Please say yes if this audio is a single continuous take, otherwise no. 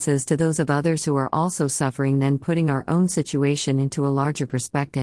yes